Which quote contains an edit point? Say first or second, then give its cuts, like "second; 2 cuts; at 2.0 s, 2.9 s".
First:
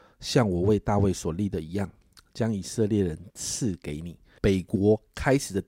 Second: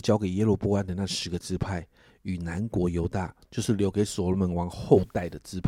first; 1 cut; at 4.4 s